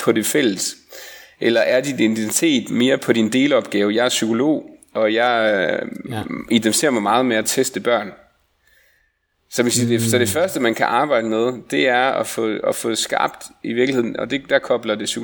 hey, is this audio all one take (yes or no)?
yes